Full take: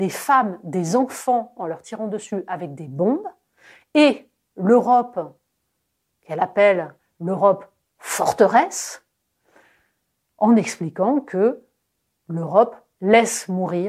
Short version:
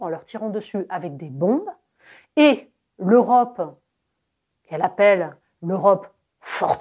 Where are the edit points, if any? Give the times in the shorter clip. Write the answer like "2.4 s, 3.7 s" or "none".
none